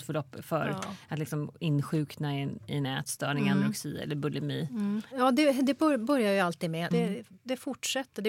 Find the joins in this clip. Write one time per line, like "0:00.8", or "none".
0:05.1
0:06.9